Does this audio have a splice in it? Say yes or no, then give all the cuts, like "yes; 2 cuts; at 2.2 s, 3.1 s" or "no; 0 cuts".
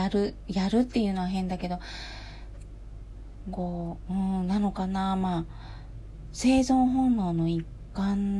yes; 1 cut; at 3.5 s